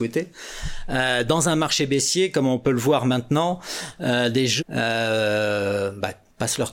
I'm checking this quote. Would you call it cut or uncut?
cut